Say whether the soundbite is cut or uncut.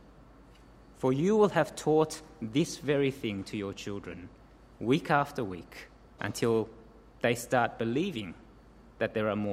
cut